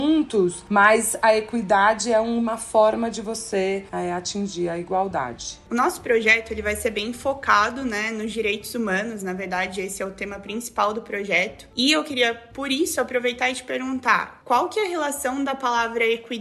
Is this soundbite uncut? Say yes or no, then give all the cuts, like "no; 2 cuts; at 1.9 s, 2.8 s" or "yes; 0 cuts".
yes; 0 cuts